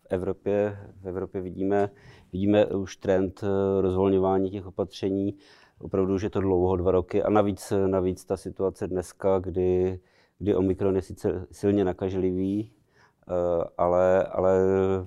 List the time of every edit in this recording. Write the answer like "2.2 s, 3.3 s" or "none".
none